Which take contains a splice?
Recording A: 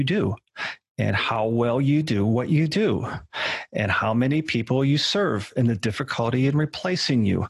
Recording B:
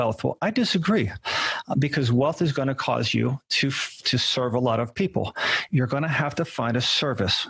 B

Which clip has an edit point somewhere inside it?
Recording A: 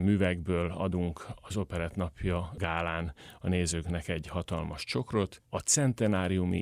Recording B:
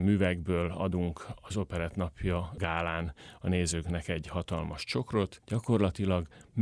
B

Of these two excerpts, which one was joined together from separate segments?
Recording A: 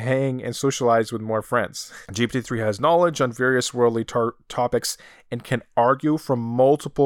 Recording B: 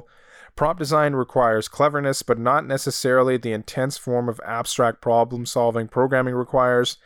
A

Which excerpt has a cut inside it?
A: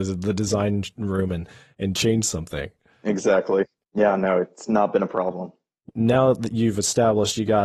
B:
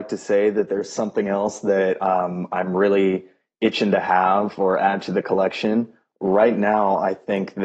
A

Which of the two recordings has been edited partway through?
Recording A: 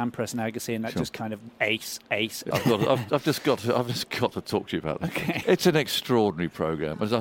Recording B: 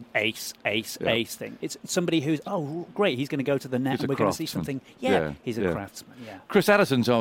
A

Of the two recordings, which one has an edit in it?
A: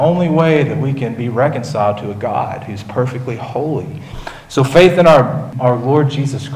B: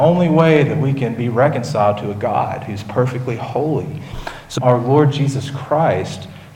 B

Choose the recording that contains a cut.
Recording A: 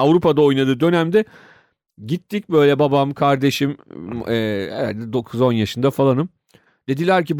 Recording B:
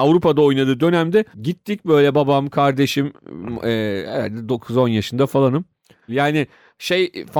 B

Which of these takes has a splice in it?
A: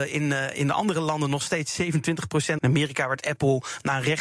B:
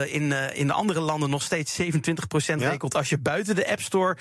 A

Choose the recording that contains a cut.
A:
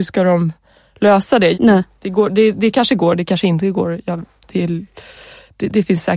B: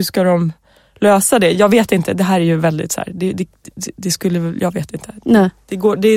A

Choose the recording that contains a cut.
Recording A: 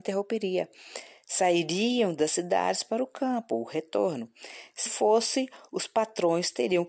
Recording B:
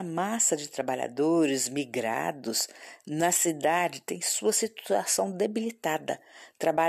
A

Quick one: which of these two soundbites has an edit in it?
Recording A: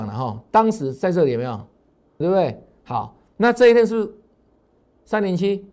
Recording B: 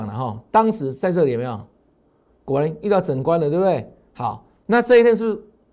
A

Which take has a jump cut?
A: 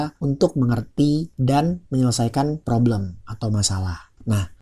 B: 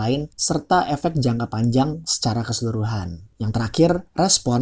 A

